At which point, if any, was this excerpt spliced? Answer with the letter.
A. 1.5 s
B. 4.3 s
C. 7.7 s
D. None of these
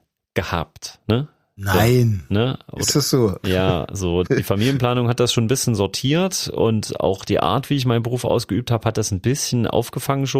B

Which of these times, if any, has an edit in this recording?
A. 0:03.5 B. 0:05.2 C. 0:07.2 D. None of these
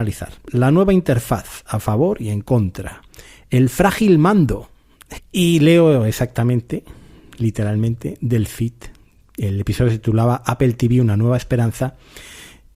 B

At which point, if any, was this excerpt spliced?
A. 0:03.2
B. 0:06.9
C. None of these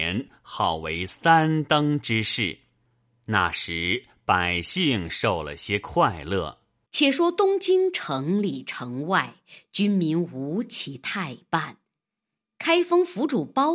B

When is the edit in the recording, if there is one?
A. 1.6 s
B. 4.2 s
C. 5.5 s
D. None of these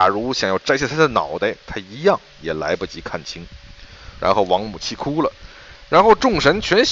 B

